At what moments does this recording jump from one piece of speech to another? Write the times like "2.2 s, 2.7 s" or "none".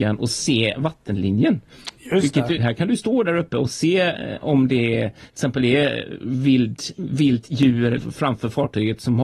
2.6 s, 8.0 s